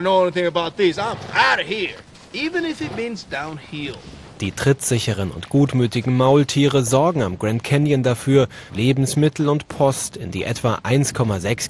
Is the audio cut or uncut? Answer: cut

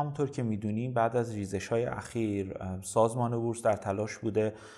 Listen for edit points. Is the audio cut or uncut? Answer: uncut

